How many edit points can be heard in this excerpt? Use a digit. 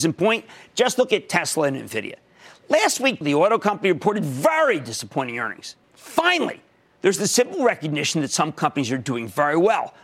2